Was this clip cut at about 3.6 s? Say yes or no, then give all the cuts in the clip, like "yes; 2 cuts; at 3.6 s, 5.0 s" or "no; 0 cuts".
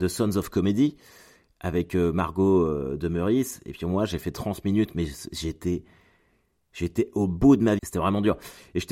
no; 1 cut; at 7.8 s